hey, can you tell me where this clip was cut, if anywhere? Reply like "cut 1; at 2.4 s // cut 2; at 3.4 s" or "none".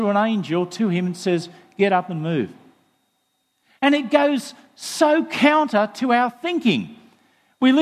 none